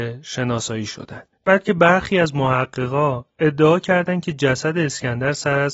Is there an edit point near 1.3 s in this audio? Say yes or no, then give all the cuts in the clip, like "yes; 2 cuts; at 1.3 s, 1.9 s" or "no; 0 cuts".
yes; 1 cut; at 1.3 s